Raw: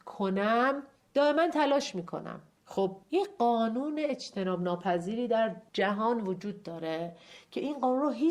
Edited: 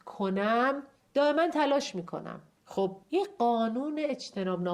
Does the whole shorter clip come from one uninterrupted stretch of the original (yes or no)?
yes